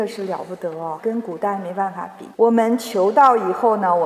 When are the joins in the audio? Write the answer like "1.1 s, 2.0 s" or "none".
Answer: 1.0 s, 2.3 s